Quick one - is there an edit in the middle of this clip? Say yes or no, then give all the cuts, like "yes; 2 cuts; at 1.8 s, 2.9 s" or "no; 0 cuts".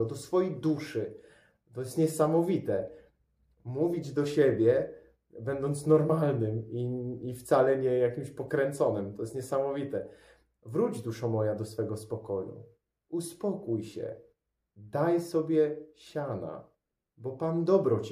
no; 0 cuts